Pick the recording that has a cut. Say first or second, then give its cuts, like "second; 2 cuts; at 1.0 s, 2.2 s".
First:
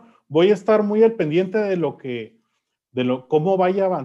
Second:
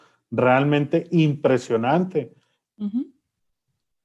second; 1 cut; at 2.7 s